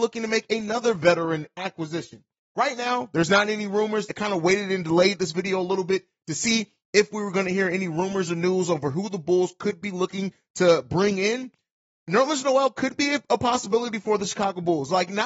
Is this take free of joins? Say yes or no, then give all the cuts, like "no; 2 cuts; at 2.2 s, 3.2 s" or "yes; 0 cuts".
no; 1 cut; at 4.1 s